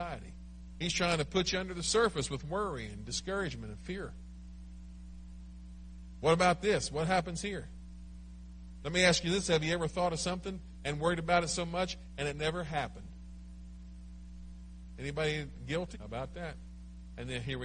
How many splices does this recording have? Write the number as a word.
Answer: one